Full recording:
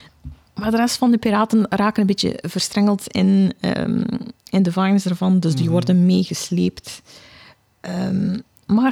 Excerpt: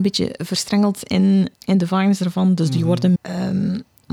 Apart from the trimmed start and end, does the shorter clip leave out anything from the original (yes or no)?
yes